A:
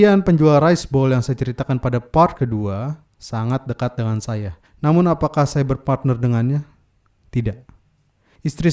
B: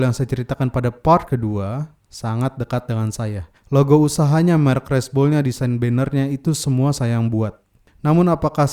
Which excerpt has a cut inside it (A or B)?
A